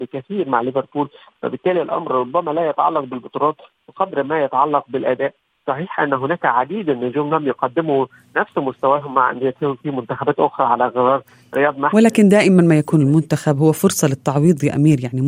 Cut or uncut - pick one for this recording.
uncut